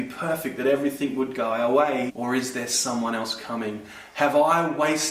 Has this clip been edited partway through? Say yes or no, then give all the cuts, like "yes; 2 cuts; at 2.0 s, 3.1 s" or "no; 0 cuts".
yes; 1 cut; at 2.1 s